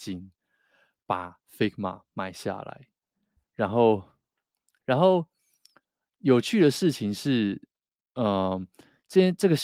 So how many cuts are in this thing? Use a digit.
1